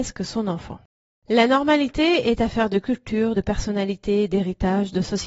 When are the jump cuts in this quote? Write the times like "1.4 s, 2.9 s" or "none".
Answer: none